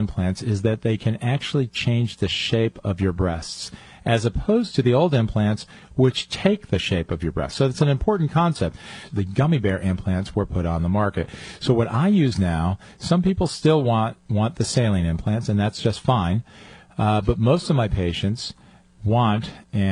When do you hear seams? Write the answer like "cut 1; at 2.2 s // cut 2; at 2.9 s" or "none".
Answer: cut 1; at 9.1 s